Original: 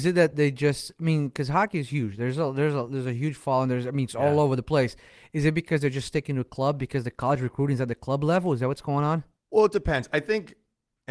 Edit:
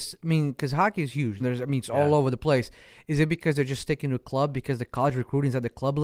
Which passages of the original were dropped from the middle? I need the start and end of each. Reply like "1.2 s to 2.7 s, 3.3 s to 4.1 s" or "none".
2.2 s to 3.7 s